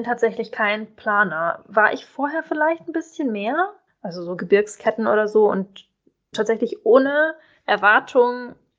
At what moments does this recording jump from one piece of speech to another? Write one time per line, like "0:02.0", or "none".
0:03.9
0:06.3

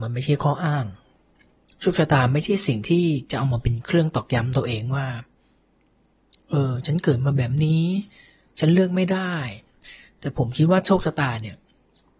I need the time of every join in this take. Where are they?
none

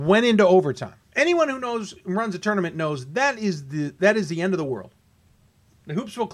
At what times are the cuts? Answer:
0:01.0

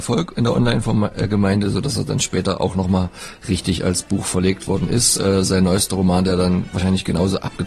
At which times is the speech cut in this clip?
none

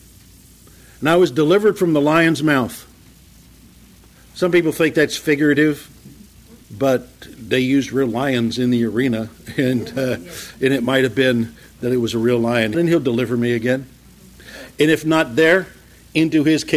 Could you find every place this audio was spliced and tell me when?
0:06.6
0:12.7

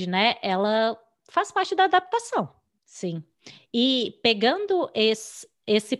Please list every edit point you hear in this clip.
0:02.8

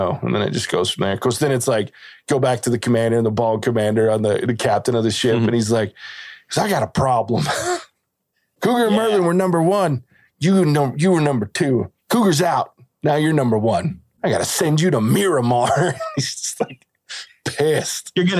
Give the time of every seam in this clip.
0:12.0

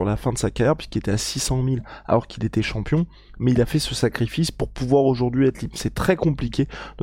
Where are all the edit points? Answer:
none

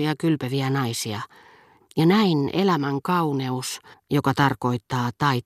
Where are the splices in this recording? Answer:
0:01.8
0:03.9

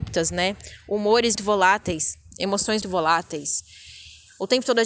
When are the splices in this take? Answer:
0:01.4
0:02.8

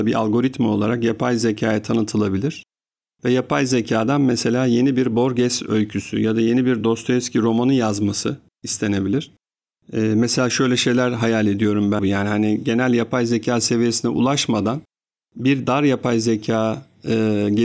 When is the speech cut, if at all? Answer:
0:09.8
0:12.0

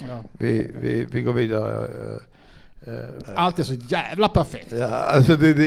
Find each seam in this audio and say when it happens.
0:03.2

